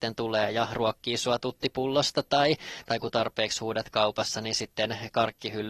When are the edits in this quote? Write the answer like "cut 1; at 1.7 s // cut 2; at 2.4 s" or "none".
none